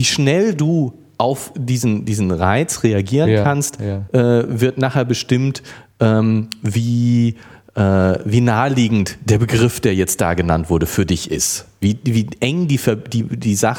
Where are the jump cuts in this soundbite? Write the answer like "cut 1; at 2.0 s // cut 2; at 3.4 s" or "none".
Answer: none